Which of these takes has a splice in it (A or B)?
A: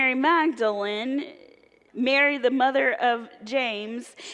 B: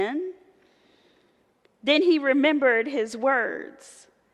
A